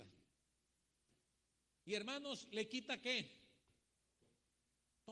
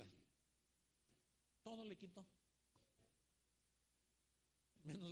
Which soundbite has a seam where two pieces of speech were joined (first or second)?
second